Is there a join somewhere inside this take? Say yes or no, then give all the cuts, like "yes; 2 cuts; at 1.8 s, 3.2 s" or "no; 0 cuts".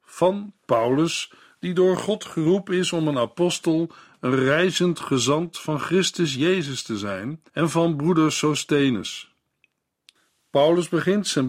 yes; 1 cut; at 7.5 s